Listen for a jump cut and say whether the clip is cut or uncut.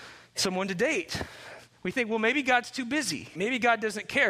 cut